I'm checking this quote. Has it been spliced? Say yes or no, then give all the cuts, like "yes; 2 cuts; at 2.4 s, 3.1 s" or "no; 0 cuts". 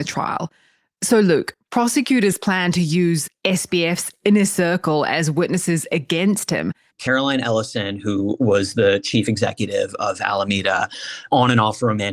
yes; 1 cut; at 6.9 s